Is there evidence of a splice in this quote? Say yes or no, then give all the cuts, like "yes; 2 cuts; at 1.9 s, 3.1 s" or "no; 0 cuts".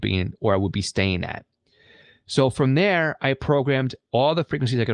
no; 0 cuts